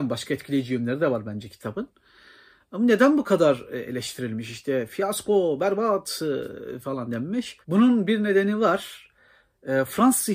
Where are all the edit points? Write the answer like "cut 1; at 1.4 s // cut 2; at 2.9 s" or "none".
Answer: cut 1; at 7.6 s